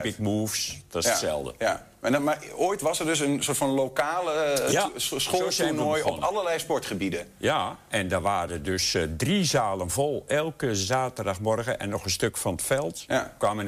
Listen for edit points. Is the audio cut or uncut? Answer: uncut